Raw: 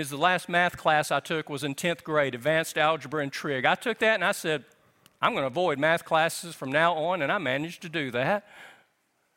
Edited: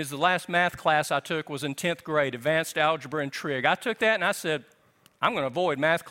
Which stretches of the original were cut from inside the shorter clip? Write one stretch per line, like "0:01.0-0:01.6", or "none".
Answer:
none